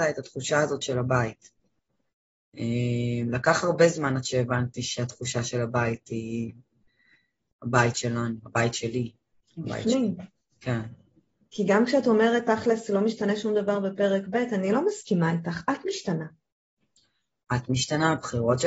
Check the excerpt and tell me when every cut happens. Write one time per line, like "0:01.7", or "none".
none

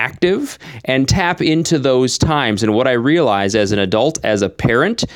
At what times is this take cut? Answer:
none

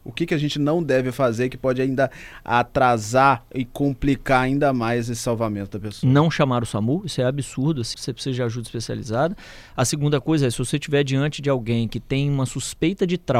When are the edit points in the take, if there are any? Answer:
0:07.9

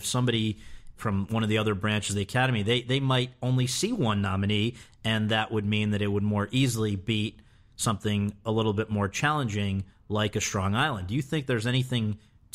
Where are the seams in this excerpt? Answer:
0:04.9

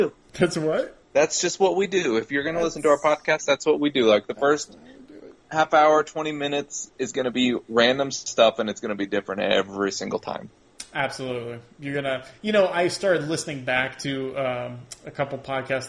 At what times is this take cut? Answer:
none

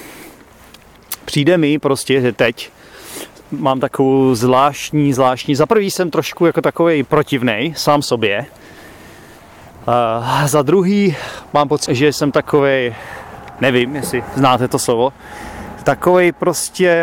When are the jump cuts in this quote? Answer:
0:11.9
0:13.6

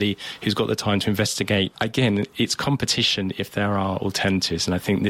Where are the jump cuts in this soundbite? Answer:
0:01.7

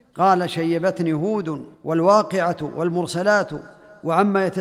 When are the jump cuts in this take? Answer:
0:01.7

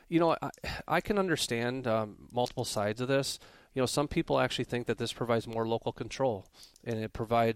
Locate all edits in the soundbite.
none

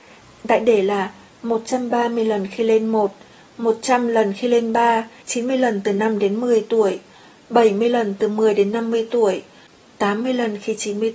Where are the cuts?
0:05.2
0:09.8

